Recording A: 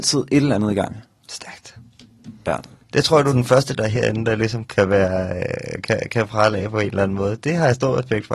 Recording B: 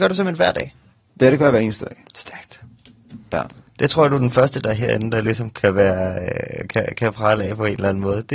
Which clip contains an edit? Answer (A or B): A